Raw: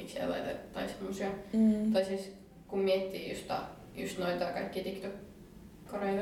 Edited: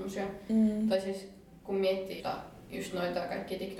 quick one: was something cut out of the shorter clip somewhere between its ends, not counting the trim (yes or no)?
yes